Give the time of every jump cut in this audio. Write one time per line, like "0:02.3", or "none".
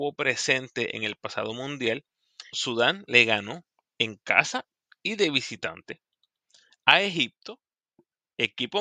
0:02.5

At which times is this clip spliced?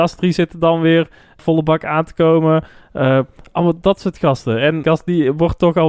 0:01.4
0:04.8

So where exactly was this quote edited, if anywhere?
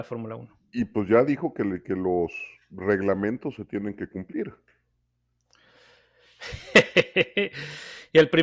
none

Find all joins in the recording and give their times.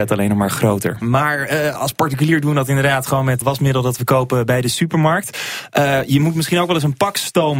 0:01.0
0:03.4

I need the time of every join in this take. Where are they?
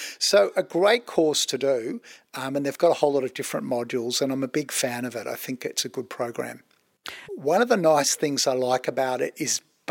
0:07.3

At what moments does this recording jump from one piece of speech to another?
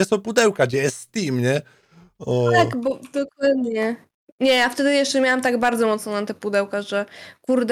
none

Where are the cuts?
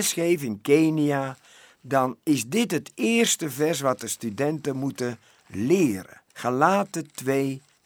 0:06.3

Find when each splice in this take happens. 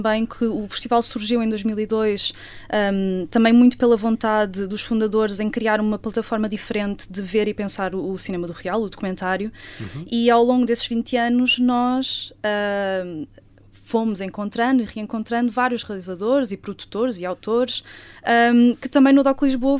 none

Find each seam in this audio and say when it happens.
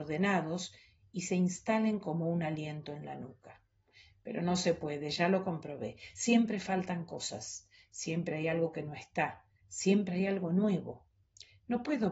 none

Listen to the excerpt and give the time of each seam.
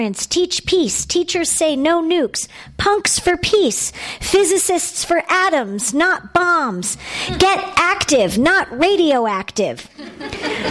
none

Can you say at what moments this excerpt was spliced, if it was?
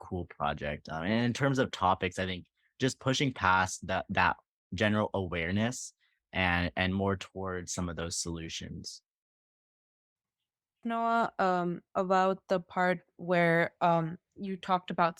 none

